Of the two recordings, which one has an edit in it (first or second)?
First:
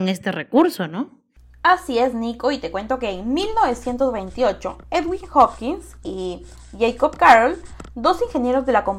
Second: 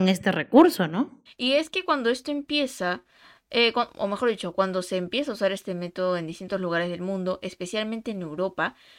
second